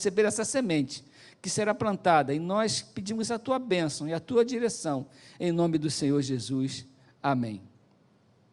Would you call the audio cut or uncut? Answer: uncut